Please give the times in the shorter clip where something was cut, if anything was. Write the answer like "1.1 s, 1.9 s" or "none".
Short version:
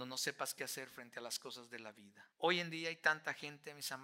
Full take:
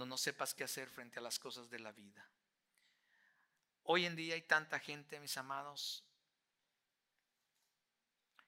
2.3 s

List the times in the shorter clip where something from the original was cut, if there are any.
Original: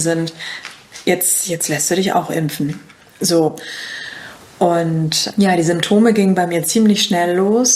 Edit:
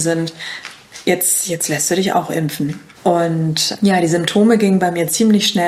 2.9 s

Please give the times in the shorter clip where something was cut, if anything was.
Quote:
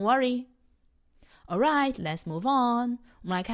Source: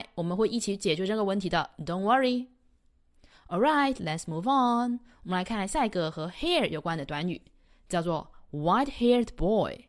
none

